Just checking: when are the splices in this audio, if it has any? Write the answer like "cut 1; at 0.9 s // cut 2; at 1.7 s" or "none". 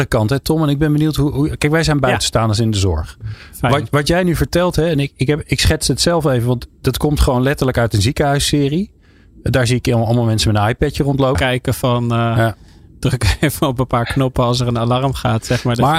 cut 1; at 11.3 s